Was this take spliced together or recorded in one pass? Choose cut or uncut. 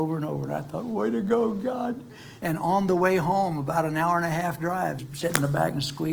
cut